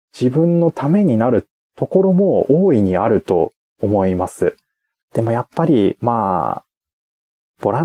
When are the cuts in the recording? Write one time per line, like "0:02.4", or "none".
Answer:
0:05.0